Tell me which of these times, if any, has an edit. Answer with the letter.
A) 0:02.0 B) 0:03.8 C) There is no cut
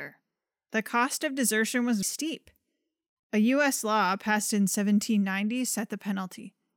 A